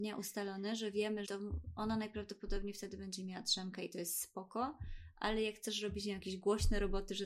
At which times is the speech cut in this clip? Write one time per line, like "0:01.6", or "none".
0:01.2